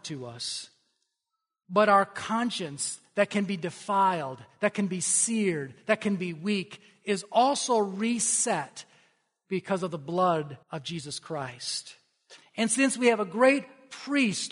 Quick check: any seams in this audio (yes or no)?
yes